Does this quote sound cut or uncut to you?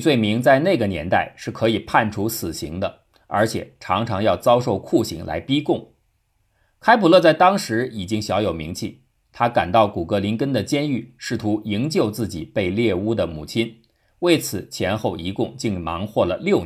uncut